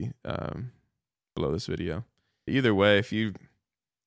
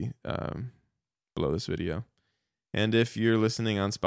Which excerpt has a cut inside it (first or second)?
first